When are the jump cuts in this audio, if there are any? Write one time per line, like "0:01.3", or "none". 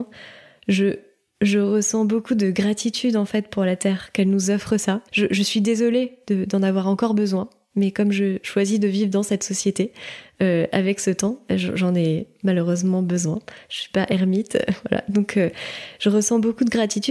0:05.1

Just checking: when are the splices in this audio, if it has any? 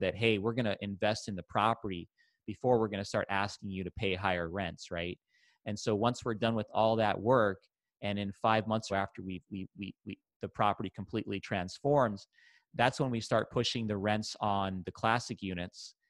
0:08.9

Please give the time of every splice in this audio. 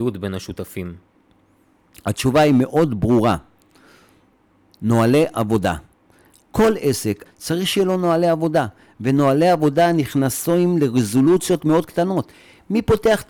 0:07.3

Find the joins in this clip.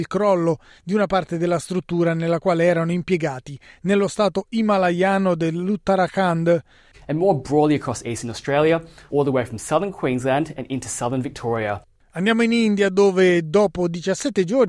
0:06.9
0:09.1

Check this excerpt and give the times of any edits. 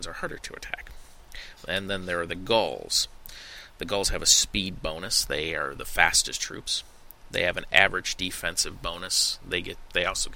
none

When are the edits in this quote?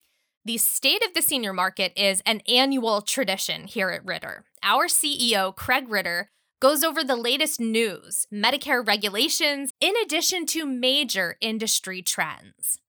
0:08.3
0:09.7

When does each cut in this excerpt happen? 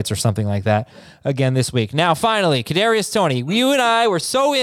none

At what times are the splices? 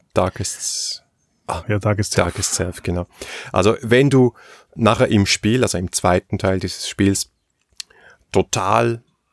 0:01.6

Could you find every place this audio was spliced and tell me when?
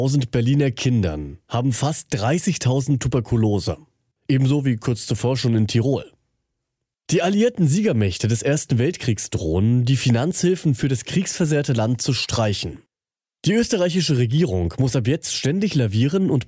0:04.2

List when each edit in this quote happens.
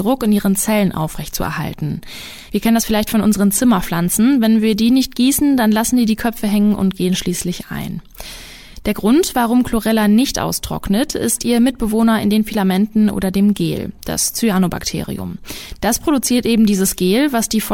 none

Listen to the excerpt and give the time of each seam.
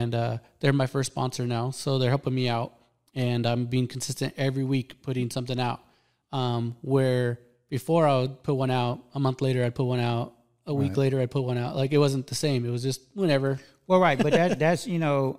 none

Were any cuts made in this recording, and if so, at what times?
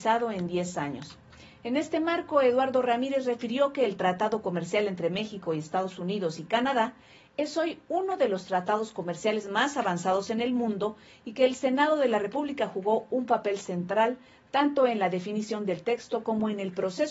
none

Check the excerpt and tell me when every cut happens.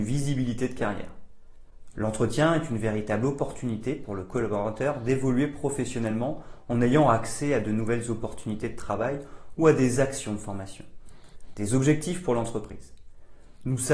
0:11.5

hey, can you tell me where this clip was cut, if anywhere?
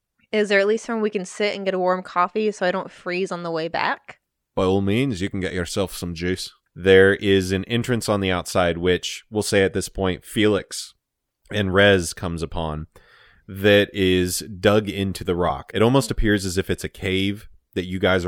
0:06.7

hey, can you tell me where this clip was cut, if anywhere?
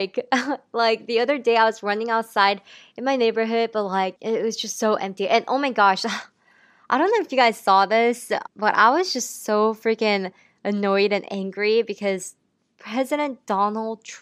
0:08.5

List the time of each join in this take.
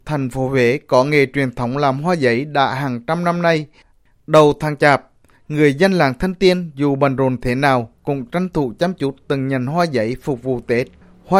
none

